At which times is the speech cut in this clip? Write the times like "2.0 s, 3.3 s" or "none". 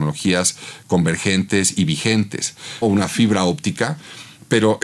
2.8 s